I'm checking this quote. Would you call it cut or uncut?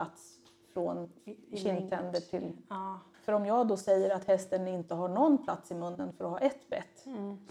cut